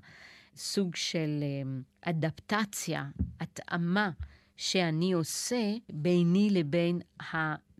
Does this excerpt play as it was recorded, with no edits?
no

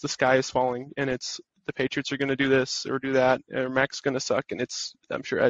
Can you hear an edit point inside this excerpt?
no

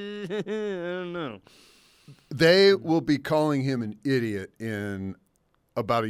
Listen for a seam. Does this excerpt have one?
no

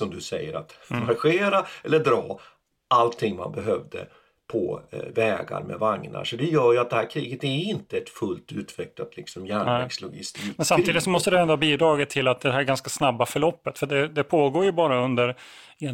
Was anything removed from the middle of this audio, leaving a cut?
no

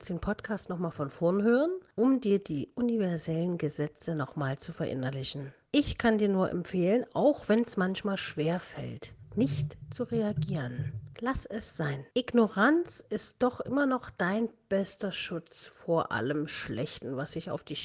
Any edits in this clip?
no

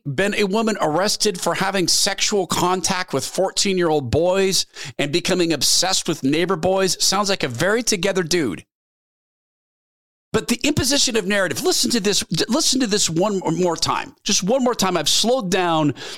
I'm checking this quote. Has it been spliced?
no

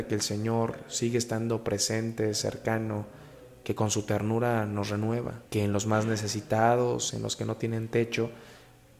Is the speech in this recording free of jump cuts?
no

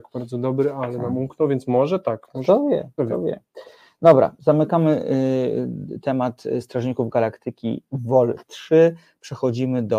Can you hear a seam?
yes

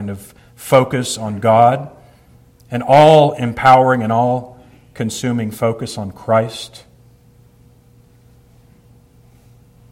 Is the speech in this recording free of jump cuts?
yes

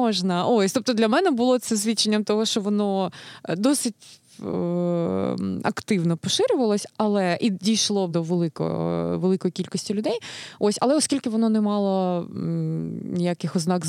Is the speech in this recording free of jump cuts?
no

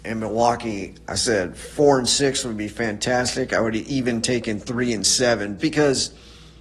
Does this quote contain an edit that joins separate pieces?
yes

